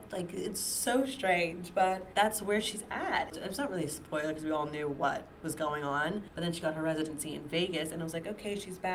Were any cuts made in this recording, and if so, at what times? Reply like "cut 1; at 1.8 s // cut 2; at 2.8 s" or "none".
cut 1; at 3.3 s // cut 2; at 6.3 s